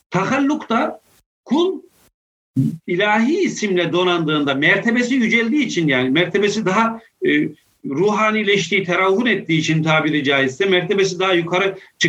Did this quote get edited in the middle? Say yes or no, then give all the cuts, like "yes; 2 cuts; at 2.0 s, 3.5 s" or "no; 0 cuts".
no; 0 cuts